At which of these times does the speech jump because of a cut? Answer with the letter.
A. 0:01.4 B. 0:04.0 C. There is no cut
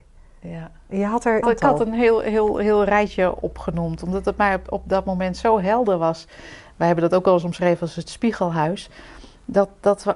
A